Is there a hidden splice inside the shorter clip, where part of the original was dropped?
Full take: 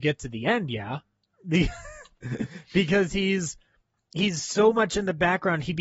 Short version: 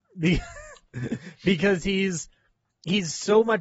no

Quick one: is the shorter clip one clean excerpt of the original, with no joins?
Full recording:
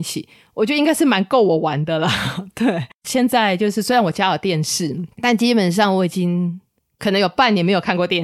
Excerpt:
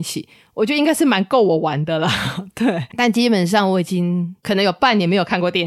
no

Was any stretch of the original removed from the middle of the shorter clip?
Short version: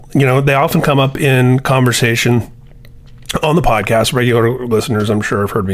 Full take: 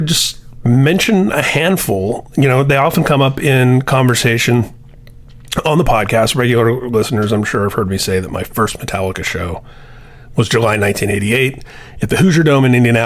no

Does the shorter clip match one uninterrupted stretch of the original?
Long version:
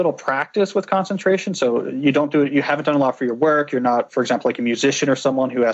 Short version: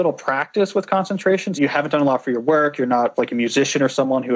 no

